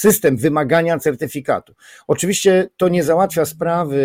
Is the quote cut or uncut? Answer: uncut